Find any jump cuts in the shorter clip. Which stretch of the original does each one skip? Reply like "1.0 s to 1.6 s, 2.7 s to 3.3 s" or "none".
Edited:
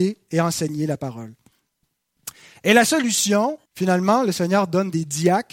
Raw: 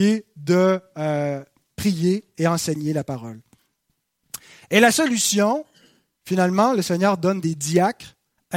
5.7 s to 6.2 s

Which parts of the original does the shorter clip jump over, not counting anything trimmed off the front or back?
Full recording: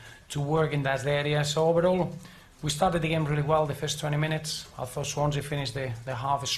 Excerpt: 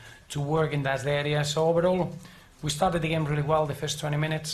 none

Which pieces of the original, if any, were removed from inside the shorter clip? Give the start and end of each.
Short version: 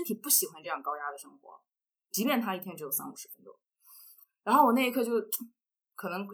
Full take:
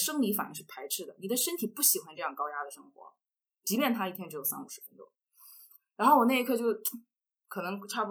none

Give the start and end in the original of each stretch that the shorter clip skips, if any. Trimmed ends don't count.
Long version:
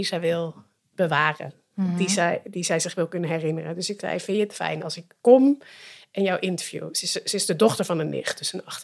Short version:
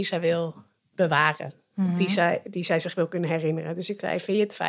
none

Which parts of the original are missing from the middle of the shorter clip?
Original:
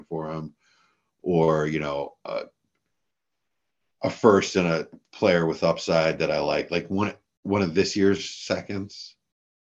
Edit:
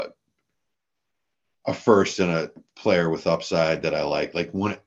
none

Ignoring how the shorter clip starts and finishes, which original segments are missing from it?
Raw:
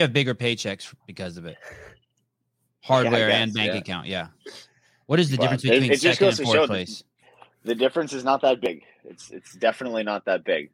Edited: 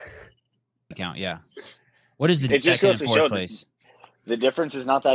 2.6 s to 3.8 s, 5.4 s to 5.9 s

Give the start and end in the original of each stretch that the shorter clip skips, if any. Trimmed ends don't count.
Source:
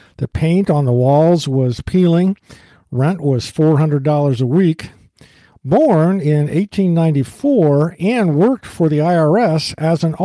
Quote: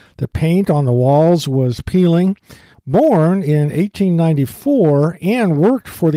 2.7 s to 5.5 s

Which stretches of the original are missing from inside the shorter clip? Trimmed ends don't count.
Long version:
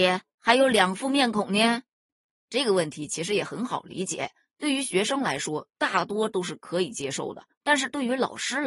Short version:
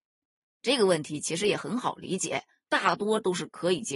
4.5 s to 5.7 s

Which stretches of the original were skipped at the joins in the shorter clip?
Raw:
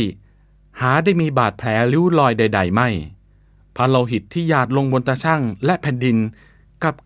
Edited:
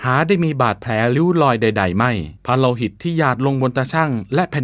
3.1 s to 3.7 s

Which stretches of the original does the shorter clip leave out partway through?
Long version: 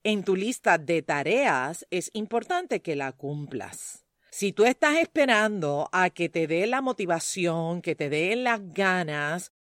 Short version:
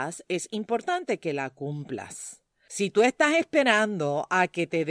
none

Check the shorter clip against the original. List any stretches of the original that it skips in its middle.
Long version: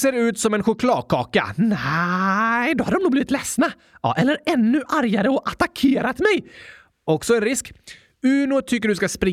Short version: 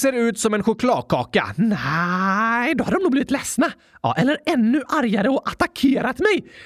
none

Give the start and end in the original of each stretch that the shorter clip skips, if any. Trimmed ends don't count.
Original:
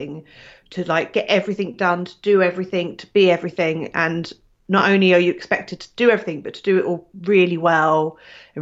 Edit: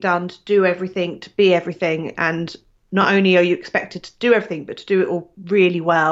none

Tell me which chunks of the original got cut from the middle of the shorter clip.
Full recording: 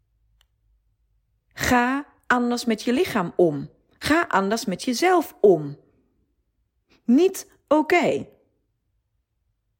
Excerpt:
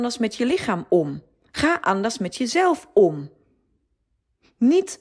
none

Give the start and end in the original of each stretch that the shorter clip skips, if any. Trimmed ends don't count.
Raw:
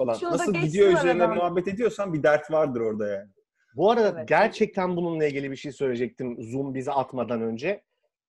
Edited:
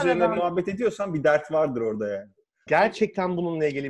3.7 s to 4.3 s

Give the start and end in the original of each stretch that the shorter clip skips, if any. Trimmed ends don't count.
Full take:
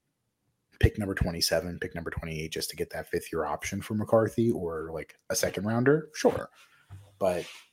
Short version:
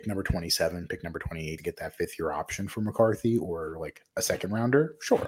2.5 s to 2.7 s

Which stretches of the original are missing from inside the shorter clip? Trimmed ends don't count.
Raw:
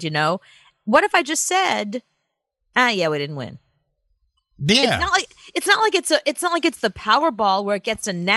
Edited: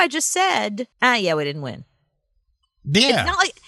2.1 s to 2.7 s

